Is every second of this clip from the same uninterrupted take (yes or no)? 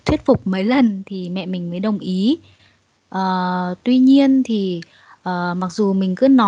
yes